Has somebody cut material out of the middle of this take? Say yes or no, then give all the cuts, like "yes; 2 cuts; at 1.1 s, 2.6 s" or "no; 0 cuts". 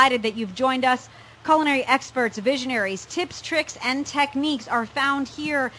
no; 0 cuts